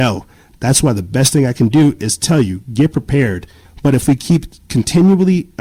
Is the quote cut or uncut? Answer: cut